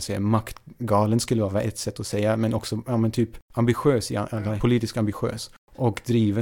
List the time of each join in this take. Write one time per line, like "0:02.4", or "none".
0:04.6